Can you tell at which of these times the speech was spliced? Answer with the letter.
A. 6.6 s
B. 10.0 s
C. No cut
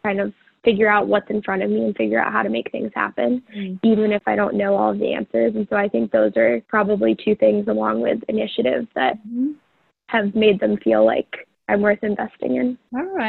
A